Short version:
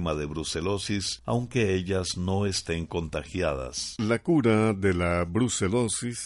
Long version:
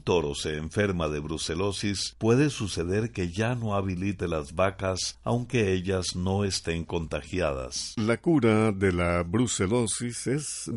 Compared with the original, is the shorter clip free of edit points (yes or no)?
no